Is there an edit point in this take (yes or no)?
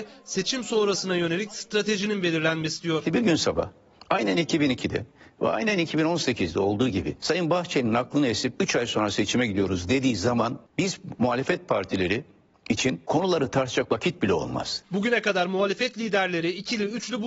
yes